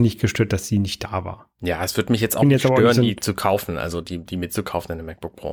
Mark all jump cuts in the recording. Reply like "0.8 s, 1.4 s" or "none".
none